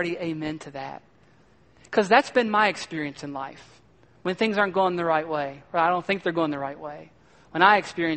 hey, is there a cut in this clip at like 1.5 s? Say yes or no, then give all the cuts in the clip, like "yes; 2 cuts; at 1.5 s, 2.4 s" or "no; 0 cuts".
no; 0 cuts